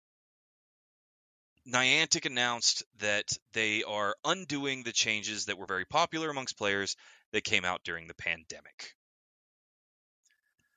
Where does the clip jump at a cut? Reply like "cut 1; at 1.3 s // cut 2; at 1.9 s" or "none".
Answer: none